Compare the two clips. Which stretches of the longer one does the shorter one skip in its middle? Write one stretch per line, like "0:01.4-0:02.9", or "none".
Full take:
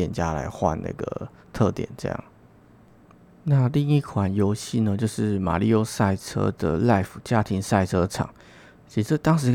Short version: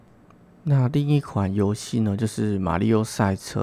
none